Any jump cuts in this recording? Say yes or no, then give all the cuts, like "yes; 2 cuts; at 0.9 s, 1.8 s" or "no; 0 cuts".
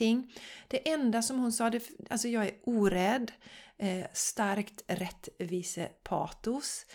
no; 0 cuts